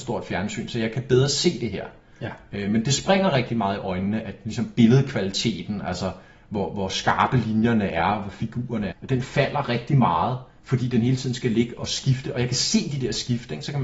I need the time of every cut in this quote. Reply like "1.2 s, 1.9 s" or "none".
8.9 s